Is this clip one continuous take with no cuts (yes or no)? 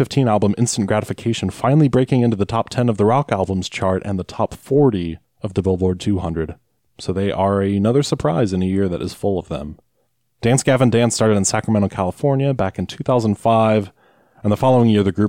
no